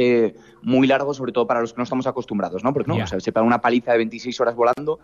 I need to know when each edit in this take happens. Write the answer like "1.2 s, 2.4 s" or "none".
2.9 s